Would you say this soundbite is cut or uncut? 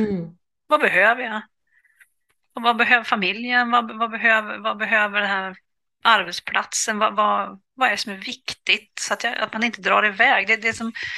uncut